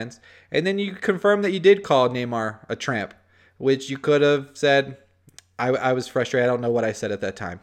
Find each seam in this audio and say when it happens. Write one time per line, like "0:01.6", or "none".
none